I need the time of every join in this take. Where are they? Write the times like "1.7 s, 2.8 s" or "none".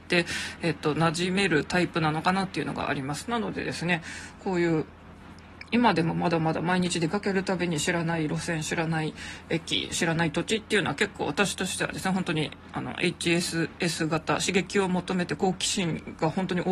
4.4 s